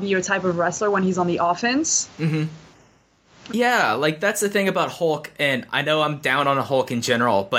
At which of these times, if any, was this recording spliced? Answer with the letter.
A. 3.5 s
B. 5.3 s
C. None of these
A